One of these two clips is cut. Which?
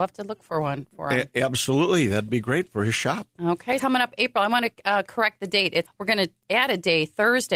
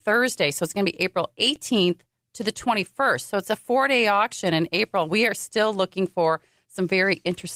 first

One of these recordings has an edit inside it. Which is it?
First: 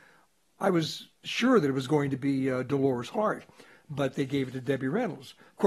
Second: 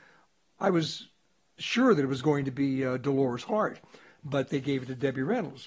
first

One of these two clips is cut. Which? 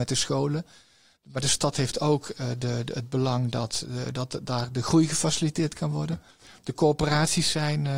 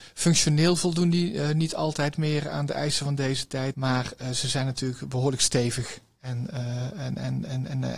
second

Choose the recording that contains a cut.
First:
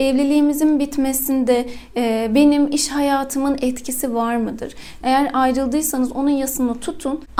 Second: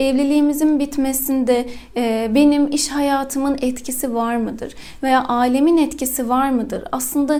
first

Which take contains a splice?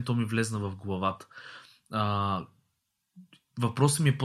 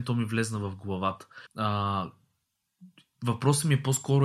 second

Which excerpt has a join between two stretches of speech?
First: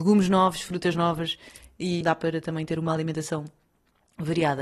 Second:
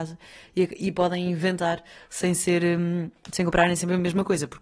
first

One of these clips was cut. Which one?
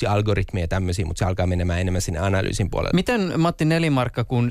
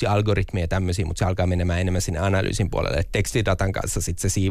first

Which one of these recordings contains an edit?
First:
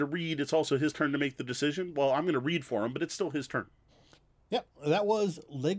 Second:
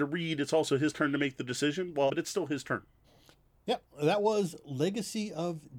second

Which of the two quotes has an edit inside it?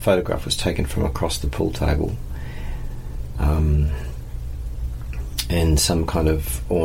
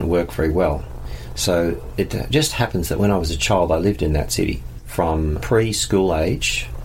first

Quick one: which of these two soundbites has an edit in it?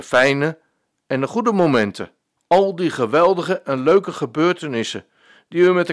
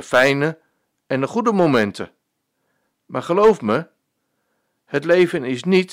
first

